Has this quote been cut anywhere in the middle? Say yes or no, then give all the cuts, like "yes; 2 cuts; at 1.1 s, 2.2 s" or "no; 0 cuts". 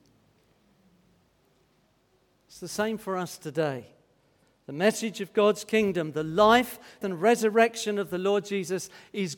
yes; 1 cut; at 7.0 s